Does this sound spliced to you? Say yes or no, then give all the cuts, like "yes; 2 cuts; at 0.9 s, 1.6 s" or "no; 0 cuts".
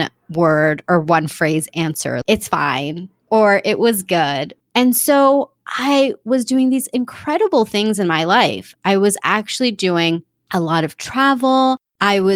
yes; 2 cuts; at 2.2 s, 4.6 s